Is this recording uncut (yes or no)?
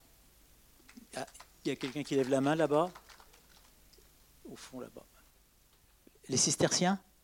yes